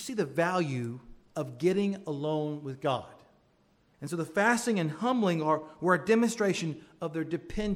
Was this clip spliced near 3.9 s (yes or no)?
yes